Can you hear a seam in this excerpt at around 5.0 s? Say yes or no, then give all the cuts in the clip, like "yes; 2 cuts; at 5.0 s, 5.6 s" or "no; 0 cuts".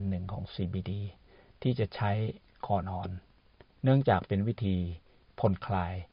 no; 1 cut; at 2.8 s